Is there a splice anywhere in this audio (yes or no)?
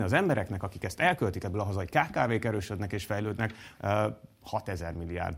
yes